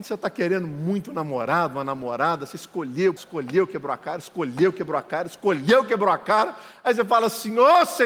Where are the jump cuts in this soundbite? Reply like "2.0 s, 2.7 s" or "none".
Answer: 3.2 s